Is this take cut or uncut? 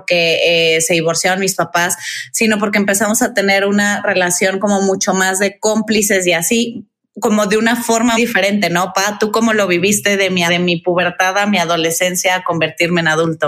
cut